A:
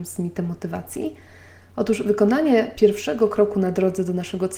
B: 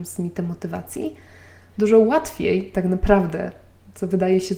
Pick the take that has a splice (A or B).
B